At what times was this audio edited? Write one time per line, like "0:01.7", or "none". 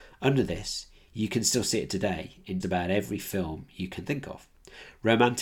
0:02.6